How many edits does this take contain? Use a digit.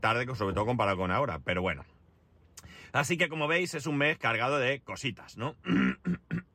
0